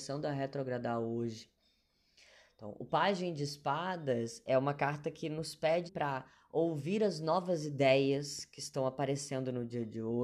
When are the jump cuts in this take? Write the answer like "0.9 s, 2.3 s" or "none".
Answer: 4.5 s, 5.9 s